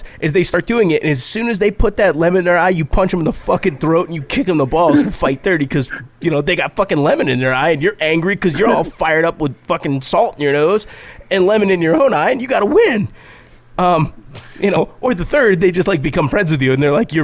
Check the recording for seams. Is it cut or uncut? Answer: uncut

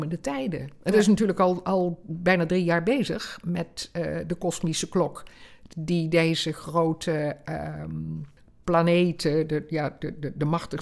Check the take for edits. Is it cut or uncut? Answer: uncut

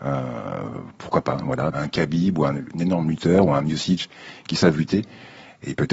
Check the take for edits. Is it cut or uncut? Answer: cut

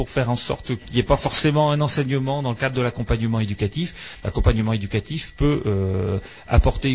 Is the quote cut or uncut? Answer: uncut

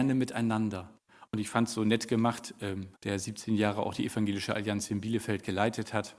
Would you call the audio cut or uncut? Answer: cut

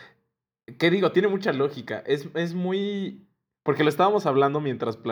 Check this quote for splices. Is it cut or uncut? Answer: uncut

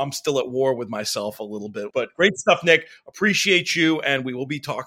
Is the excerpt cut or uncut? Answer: cut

